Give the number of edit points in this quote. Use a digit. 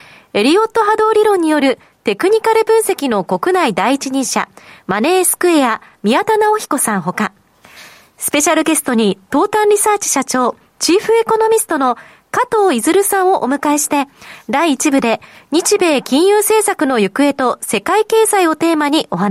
0